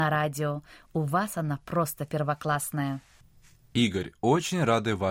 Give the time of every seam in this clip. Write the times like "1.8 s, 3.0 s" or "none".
none